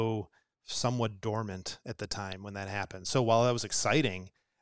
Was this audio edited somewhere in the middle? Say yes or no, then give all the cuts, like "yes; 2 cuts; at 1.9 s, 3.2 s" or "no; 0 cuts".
no; 0 cuts